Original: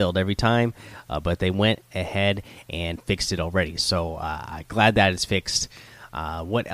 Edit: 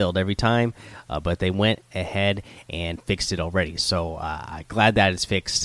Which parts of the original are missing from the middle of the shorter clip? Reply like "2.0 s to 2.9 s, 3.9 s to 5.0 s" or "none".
none